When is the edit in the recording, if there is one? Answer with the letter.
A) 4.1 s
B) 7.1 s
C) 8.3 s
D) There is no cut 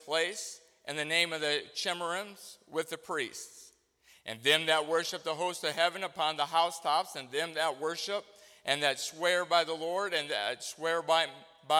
D